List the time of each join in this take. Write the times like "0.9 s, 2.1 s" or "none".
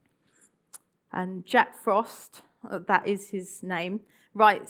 0.9 s